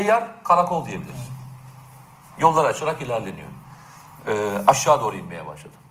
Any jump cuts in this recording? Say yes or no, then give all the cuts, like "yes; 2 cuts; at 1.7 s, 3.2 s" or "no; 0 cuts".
yes; 2 cuts; at 2.3 s, 4.2 s